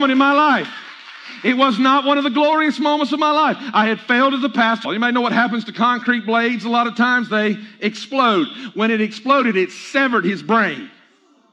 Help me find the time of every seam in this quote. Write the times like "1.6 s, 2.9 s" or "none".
4.9 s